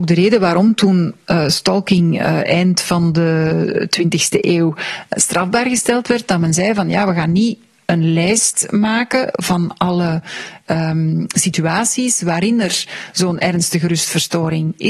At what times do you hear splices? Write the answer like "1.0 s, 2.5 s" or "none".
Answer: none